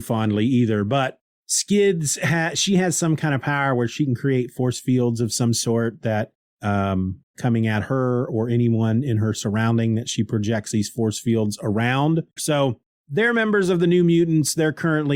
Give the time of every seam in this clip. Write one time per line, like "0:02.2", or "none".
0:07.3
0:12.4

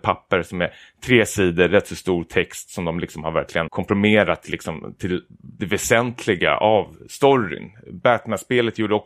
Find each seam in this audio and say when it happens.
0:03.7

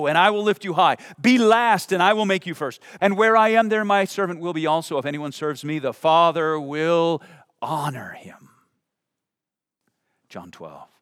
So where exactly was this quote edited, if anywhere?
0:03.0

